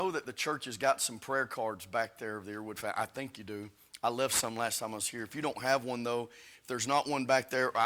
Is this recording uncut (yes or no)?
yes